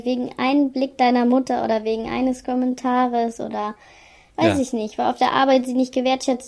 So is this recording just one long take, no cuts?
yes; 0 cuts

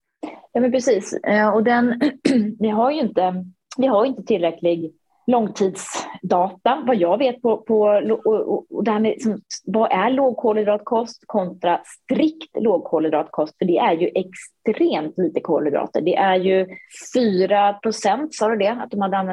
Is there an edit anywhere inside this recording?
no; 0 cuts

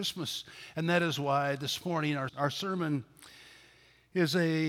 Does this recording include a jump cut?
yes; 1 cut; at 2.3 s

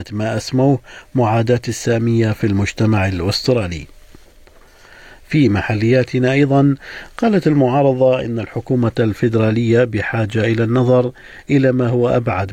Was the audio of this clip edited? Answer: no; 0 cuts

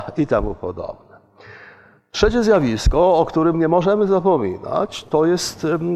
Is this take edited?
no; 0 cuts

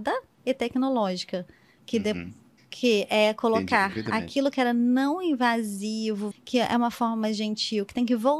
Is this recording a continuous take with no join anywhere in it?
no; 2 cuts; at 2.6 s, 6.3 s

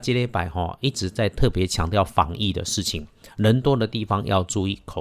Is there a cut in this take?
no; 0 cuts

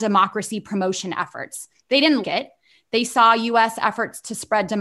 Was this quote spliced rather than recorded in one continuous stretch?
yes; 1 cut; at 2.2 s

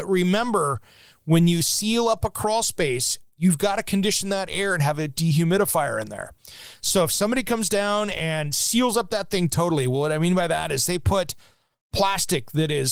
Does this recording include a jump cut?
no; 0 cuts

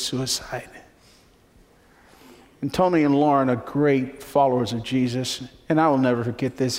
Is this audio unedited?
yes; 0 cuts

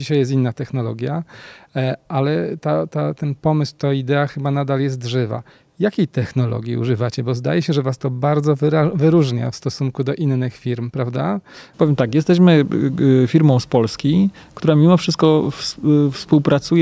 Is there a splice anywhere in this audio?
yes; 1 cut; at 11.7 s

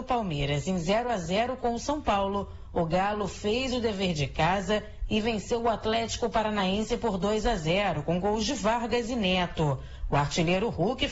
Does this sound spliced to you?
no; 0 cuts

